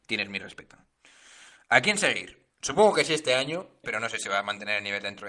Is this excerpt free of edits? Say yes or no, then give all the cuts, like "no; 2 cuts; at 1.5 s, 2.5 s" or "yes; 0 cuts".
no; 2 cuts; at 2.5 s, 3.8 s